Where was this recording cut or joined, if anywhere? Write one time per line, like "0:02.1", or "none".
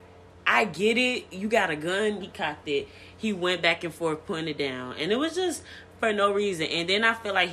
0:02.2